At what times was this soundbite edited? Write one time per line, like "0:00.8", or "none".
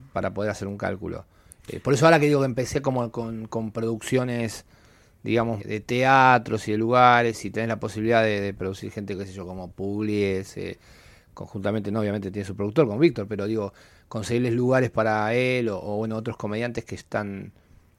0:05.6